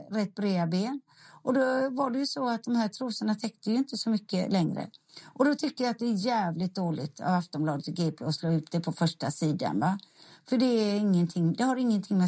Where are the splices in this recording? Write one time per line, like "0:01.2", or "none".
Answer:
none